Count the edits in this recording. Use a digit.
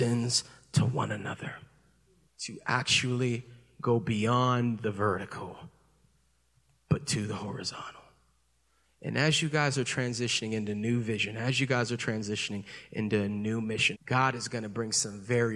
2